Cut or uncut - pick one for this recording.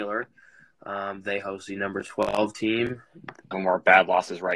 cut